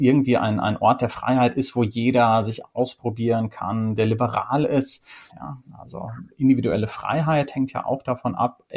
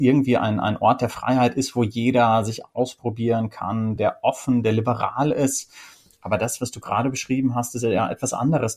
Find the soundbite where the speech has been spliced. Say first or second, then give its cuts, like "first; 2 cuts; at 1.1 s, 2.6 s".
first; 2 cuts; at 4.0 s, 5.3 s